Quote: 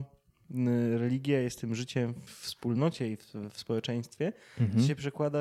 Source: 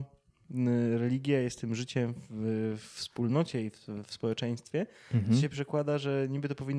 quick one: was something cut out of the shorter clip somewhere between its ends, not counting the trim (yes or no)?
yes